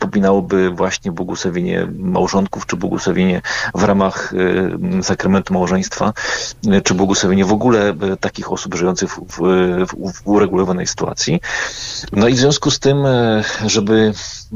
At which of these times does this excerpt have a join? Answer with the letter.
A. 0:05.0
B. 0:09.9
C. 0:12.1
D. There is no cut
D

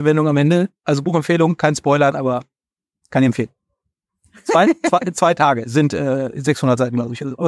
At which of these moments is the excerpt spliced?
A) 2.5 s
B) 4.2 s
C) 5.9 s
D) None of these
D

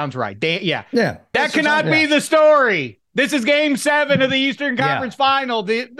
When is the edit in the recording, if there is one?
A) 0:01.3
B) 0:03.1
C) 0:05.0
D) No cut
A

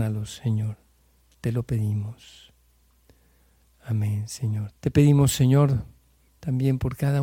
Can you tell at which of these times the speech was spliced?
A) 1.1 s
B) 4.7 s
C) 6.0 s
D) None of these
B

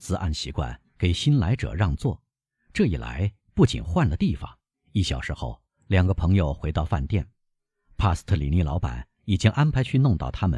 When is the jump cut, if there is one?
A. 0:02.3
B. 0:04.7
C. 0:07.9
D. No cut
B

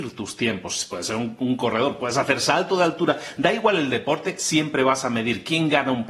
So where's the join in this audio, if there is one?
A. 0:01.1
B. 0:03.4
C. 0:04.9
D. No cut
D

